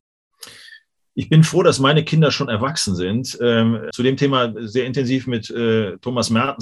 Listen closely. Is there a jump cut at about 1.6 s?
no; 1 cut; at 3.9 s

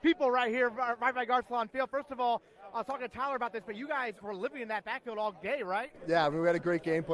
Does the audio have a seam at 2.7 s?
no; 1 cut; at 4.2 s

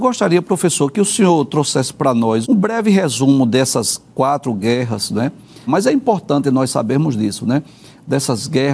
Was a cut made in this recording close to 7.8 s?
no; 2 cuts; at 2.4 s, 5.7 s

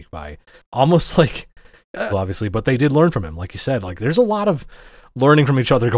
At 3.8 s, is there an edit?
no; 1 cut; at 2.1 s

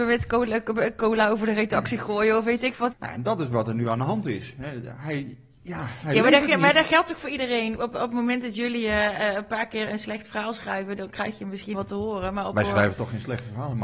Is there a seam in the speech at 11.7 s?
yes; 3 cuts; at 2.9 s, 9.9 s, 11.7 s

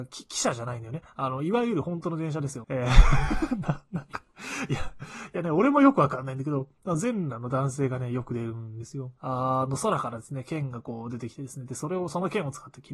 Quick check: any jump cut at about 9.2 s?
yes; 2 cuts; at 2.6 s, 9.2 s

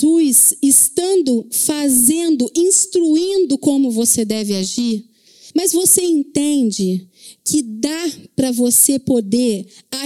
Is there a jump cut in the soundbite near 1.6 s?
no; 1 cut; at 5.5 s

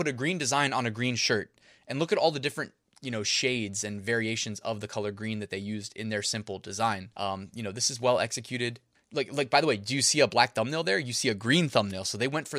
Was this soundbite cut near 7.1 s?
yes; 2 cuts; at 7.1 s, 8.9 s

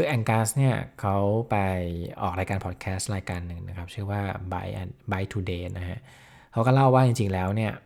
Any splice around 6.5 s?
no; 1 cut; at 2.1 s

